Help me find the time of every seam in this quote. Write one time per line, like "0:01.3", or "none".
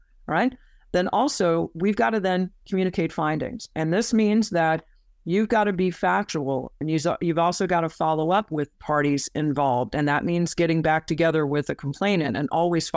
0:06.8